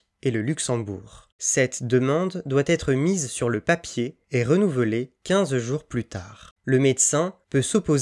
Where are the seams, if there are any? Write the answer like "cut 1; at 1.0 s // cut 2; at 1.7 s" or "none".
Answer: cut 1; at 1.3 s // cut 2; at 6.6 s

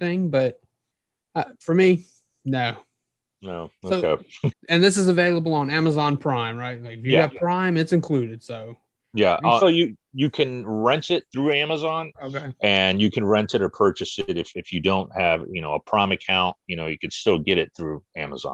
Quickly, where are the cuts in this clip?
cut 1; at 4.5 s // cut 2; at 9.6 s // cut 3; at 12.1 s

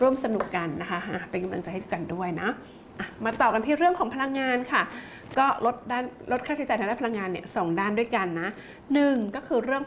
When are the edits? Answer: none

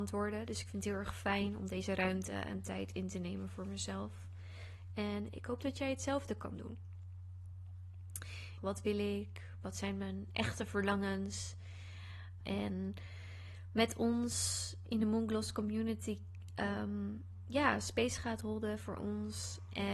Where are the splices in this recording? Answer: cut 1; at 8.6 s // cut 2; at 12.4 s

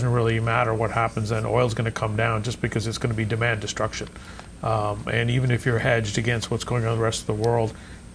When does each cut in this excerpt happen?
none

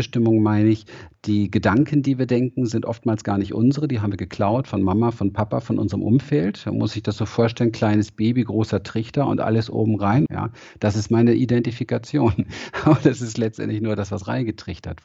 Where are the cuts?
cut 1; at 10.3 s

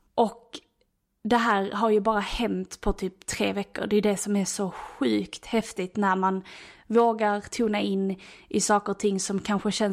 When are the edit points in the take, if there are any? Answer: none

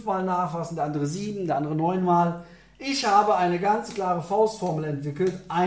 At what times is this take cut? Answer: none

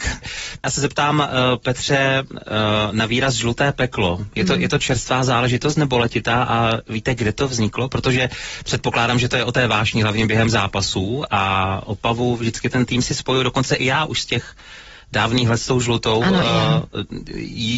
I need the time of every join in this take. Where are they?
none

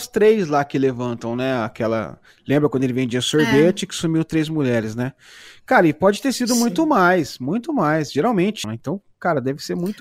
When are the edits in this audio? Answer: cut 1; at 8.6 s

